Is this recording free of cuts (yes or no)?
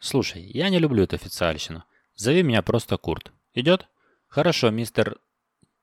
yes